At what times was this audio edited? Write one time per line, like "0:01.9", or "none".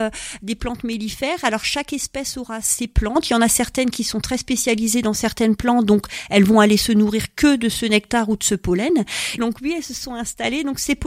0:09.4